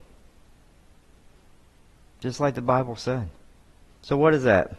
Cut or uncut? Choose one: cut